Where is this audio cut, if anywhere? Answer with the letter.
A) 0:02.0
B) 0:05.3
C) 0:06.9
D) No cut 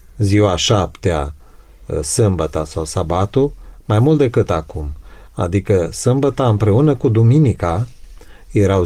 D